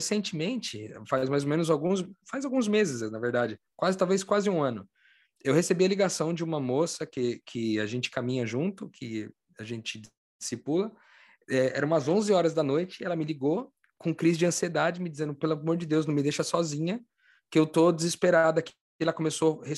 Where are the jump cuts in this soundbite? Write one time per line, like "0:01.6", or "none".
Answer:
none